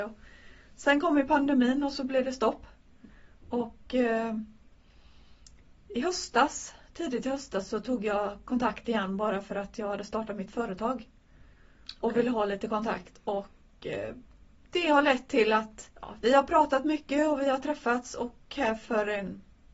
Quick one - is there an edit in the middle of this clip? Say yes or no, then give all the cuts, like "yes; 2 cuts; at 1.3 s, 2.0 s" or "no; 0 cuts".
yes; 1 cut; at 15.9 s